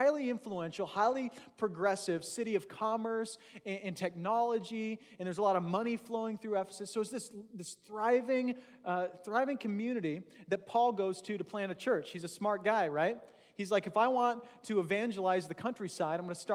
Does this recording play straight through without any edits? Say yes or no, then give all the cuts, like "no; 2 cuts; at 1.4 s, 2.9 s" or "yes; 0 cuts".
yes; 0 cuts